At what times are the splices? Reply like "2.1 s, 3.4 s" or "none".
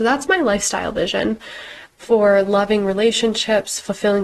1.9 s